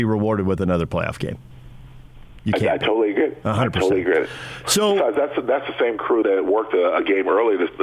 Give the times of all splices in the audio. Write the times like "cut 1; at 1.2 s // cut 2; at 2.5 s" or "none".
cut 1; at 6.2 s